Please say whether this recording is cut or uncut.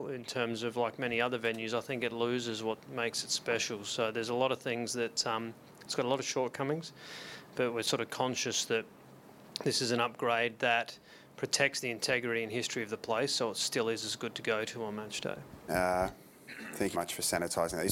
cut